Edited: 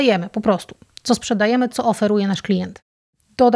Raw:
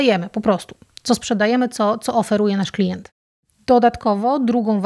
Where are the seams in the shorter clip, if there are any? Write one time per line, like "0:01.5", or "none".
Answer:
0:01.7